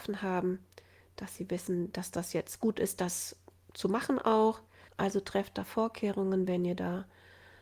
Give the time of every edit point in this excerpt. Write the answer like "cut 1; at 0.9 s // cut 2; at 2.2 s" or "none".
cut 1; at 4.9 s